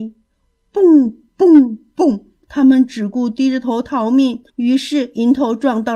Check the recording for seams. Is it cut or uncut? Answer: cut